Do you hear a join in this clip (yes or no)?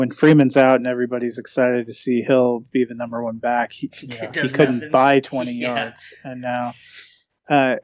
no